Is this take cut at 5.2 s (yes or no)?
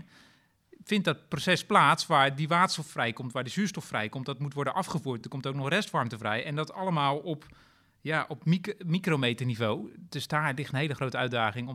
no